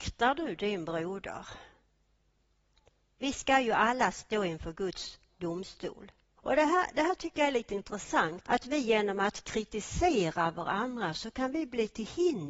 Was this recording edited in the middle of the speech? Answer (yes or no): yes